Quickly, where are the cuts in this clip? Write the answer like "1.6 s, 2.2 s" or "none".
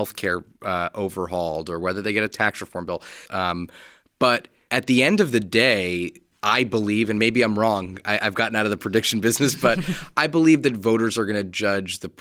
3.3 s